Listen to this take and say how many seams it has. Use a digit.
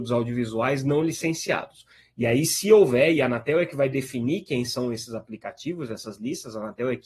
0